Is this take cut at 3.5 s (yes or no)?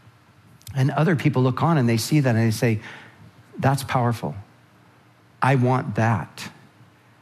no